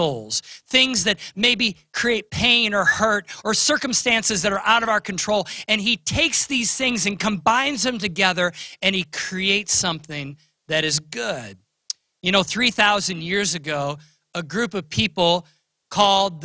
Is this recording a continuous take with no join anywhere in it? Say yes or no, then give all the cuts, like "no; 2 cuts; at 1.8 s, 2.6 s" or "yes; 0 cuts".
yes; 0 cuts